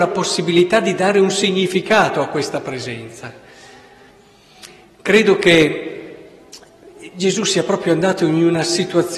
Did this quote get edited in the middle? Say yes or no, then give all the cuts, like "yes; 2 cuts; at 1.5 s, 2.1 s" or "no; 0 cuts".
no; 0 cuts